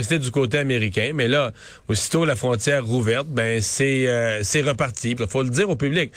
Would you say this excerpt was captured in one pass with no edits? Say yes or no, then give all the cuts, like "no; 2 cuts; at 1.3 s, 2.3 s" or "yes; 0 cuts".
no; 1 cut; at 5.2 s